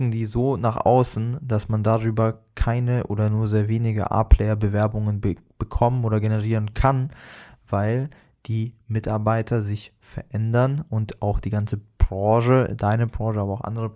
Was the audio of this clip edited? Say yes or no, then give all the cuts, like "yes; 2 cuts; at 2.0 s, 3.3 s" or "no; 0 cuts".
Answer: no; 0 cuts